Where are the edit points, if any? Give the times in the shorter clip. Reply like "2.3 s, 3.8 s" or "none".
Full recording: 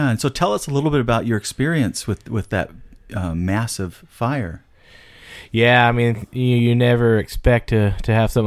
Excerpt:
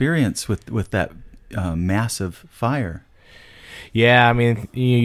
none